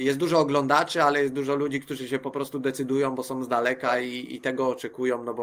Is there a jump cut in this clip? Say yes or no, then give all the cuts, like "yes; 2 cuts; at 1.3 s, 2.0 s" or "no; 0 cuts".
no; 0 cuts